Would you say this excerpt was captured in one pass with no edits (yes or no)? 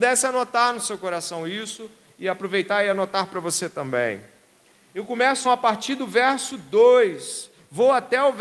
no